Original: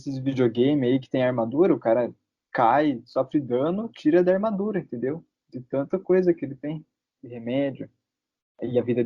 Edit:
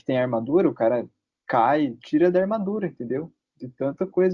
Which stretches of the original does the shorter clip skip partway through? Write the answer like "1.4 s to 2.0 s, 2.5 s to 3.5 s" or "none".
3.0 s to 3.9 s